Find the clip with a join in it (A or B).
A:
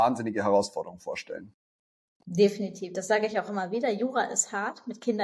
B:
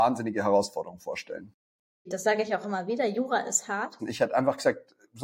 B